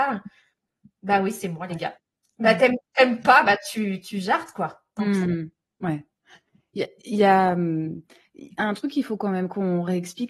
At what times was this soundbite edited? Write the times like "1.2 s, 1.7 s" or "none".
none